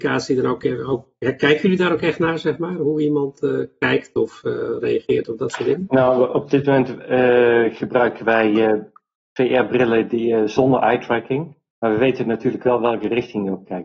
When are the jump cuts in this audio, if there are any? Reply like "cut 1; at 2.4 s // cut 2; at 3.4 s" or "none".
none